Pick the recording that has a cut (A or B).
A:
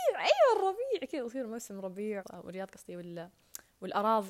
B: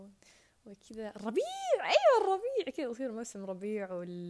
A